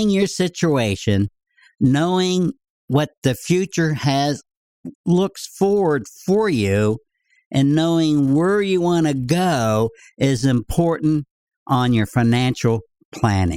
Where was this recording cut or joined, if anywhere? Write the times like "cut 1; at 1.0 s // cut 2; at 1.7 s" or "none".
cut 1; at 4.9 s